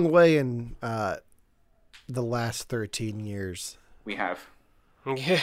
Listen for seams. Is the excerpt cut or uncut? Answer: uncut